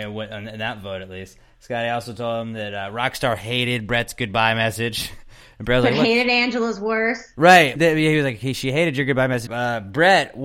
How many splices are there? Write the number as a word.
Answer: two